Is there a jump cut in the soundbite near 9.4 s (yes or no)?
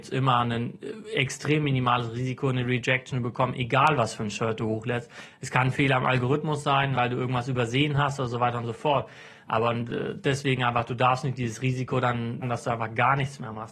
no